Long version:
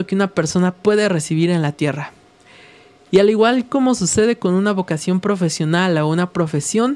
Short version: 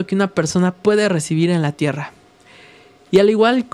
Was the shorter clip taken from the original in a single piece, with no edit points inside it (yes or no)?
yes